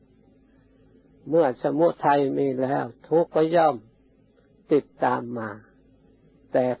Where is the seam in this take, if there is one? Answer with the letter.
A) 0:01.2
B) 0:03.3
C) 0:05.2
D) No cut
B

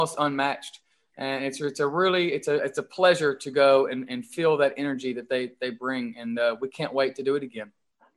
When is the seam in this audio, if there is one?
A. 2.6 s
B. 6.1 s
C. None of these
A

